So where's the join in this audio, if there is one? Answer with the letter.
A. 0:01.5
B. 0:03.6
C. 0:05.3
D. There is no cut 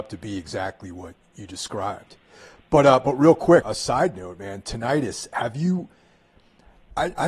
B